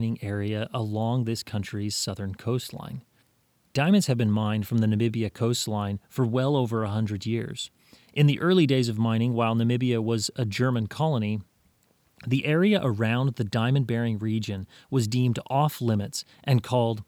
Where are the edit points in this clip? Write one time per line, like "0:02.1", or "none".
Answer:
none